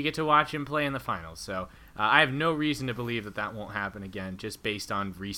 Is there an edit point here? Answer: no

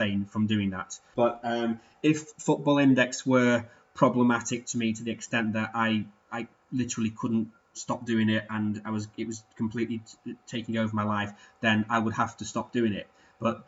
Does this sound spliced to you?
yes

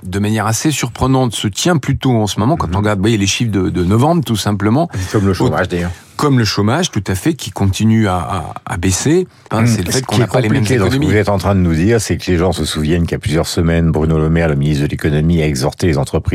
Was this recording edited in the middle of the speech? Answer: yes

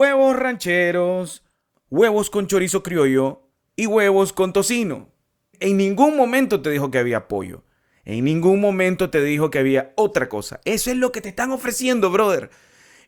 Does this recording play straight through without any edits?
yes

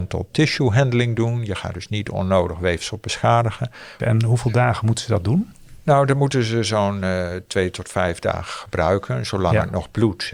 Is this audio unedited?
no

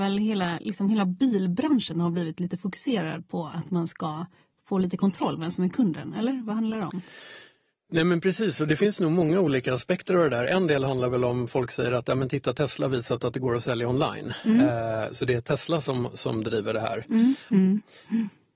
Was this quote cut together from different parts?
yes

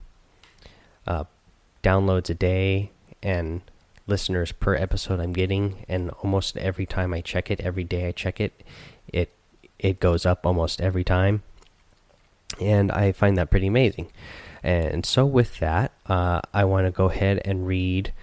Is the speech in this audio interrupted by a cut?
no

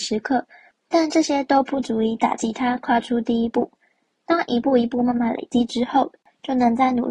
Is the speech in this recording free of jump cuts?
yes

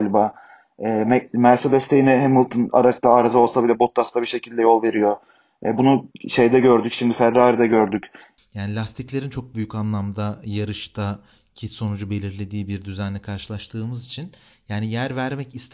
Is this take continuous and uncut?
no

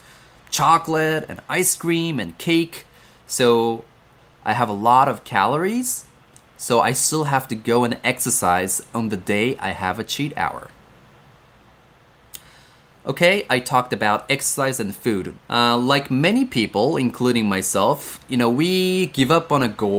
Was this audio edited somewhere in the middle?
yes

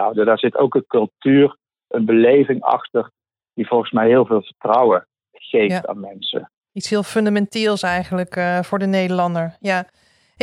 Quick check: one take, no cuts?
no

